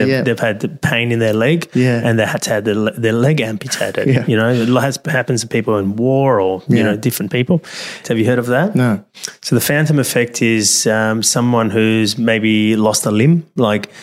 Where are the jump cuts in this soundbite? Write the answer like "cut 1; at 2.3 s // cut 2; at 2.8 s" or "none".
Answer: cut 1; at 8.0 s